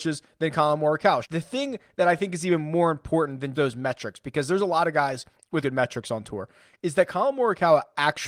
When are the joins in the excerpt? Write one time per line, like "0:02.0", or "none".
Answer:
0:01.2
0:03.5
0:05.6

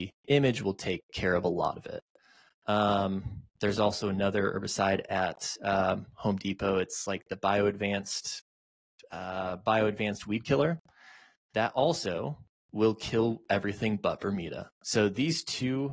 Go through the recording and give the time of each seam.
none

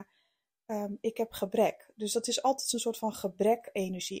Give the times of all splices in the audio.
none

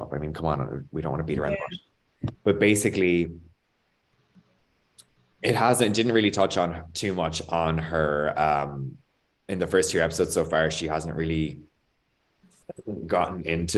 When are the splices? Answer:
none

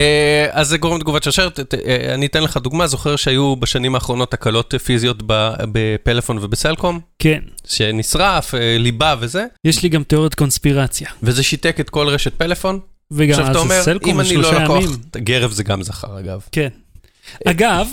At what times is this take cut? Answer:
0:09.6
0:15.1

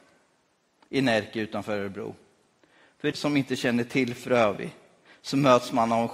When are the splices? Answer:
0:03.1

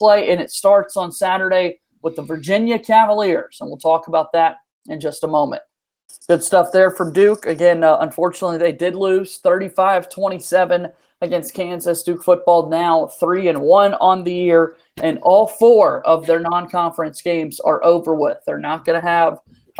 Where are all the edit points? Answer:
0:06.1

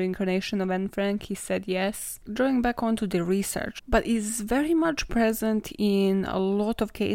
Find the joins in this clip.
0:02.3
0:03.8

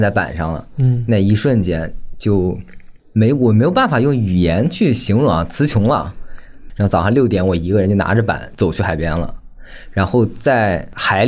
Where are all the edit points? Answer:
0:03.0
0:06.7

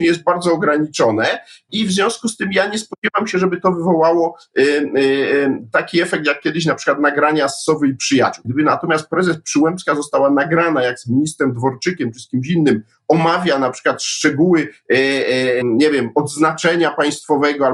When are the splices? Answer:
0:08.4
0:15.6

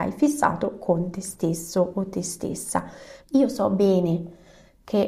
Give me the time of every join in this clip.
0:03.2

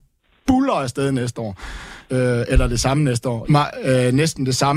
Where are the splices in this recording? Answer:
0:02.1
0:03.4

